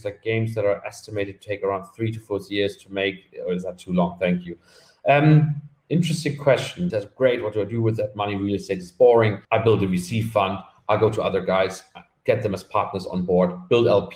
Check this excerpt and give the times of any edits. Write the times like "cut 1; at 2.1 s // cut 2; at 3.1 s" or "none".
cut 1; at 6.9 s // cut 2; at 9.4 s

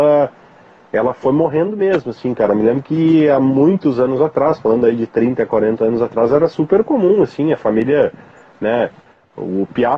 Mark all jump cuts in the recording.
none

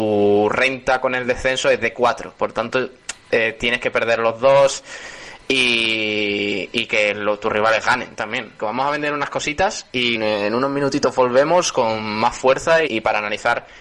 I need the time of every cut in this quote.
cut 1; at 8.6 s // cut 2; at 10.1 s // cut 3; at 12.9 s

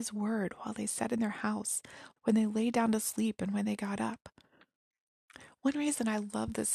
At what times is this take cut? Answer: cut 1; at 2.2 s

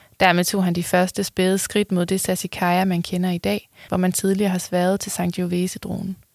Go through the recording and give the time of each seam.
cut 1; at 3.9 s

